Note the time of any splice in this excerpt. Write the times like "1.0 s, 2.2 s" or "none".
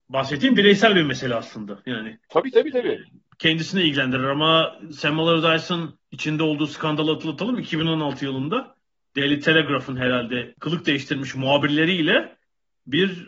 2.2 s, 6.0 s